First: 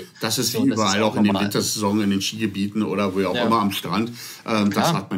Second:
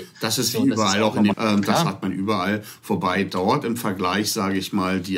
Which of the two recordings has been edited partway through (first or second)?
second